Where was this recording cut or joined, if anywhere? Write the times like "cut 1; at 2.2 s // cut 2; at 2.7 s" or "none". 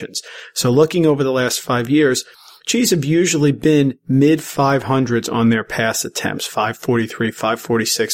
none